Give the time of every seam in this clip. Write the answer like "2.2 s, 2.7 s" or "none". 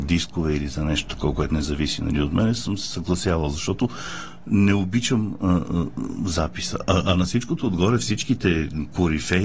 none